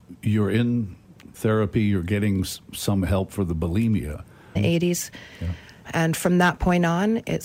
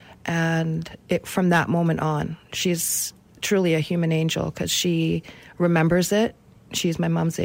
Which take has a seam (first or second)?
first